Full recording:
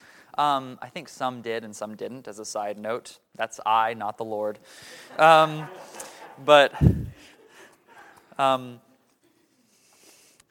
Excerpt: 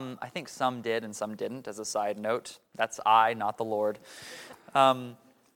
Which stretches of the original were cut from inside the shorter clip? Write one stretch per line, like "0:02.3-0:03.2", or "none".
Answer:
0:05.1-0:08.2